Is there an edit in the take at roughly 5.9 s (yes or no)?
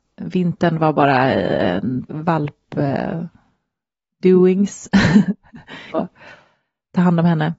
yes